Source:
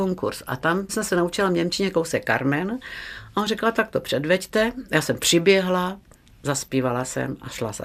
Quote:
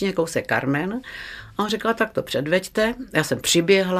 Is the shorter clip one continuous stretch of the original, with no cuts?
yes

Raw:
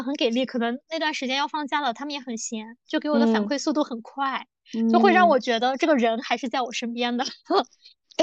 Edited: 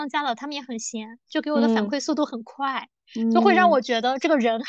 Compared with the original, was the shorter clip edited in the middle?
no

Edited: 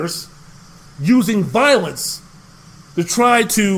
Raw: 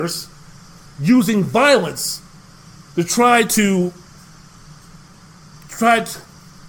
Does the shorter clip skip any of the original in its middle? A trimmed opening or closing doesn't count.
no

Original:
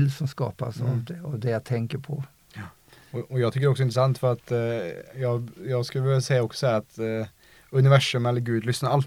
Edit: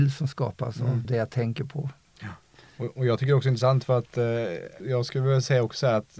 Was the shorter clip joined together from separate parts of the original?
yes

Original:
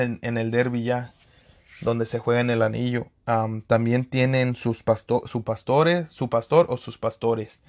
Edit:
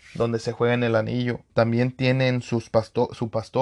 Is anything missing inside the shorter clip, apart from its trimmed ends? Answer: yes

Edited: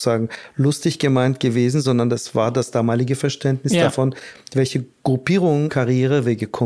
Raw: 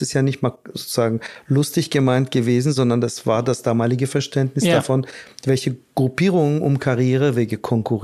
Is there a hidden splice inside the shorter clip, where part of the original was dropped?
yes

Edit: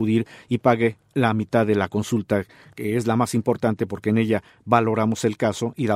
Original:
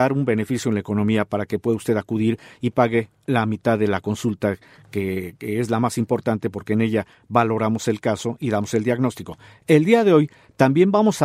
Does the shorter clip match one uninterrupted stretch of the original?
no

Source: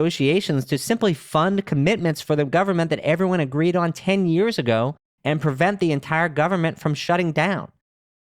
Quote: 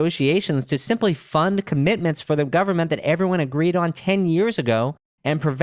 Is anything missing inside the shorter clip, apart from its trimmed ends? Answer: no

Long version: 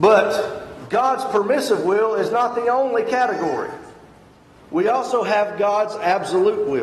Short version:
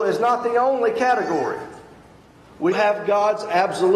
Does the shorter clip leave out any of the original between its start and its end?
yes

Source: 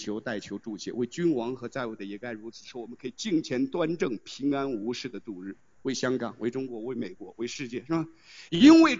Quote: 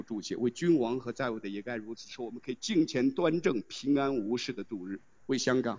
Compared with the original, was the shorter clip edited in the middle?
no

